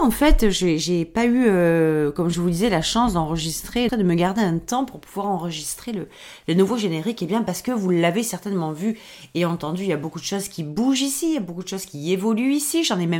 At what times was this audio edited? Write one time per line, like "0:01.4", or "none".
0:03.9